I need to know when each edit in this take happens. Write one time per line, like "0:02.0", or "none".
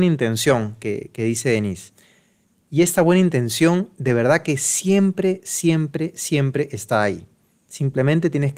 none